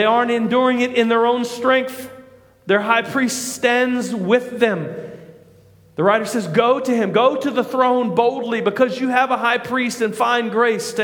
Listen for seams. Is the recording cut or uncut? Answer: uncut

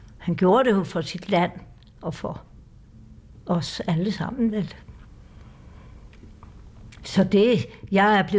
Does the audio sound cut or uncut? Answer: uncut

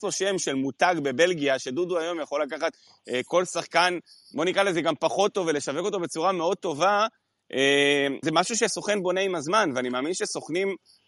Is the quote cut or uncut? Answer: cut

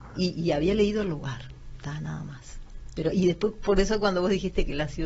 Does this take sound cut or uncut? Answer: uncut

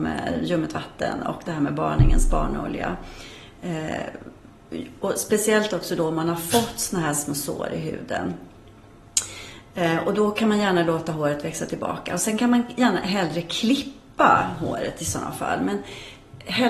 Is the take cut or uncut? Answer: uncut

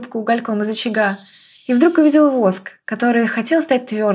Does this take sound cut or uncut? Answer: uncut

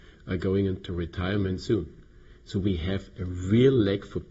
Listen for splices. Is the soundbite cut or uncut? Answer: uncut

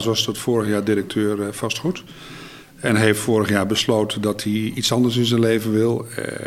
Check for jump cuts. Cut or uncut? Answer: uncut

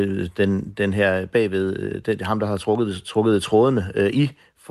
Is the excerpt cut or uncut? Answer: uncut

